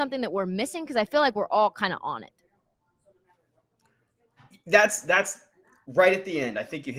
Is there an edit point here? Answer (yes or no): no